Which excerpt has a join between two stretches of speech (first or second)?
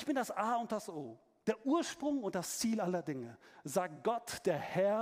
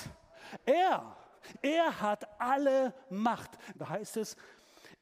second